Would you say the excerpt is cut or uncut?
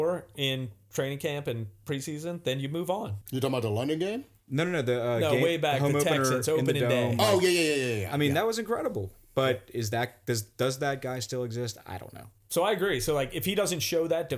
cut